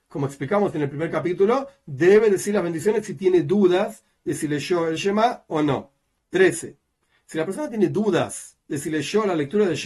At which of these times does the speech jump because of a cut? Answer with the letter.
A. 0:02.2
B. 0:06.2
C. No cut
B